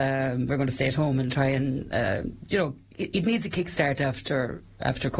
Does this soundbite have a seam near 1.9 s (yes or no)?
no